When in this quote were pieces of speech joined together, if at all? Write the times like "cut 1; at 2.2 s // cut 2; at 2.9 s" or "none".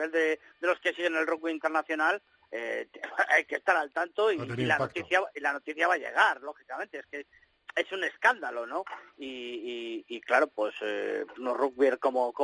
cut 1; at 11.4 s